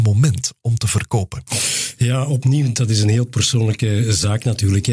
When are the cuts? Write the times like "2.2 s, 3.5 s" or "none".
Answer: none